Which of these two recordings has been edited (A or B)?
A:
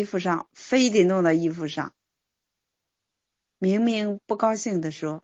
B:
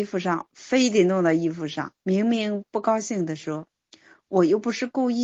B